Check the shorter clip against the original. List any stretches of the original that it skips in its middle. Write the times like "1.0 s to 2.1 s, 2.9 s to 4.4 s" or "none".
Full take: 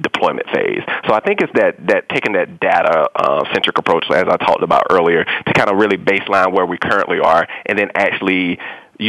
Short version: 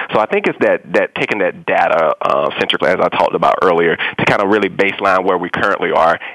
3.7 s to 4.1 s